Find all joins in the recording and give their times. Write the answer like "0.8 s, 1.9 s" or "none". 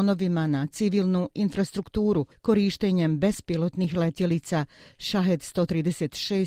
2.3 s